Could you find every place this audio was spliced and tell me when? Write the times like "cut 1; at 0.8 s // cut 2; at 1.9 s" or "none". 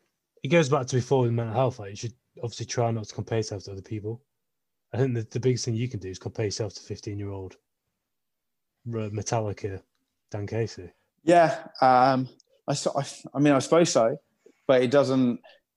none